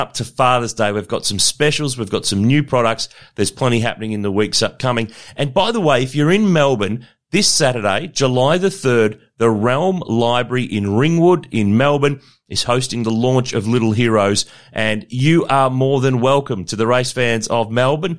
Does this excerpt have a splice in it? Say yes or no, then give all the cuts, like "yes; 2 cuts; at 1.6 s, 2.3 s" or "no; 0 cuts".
no; 0 cuts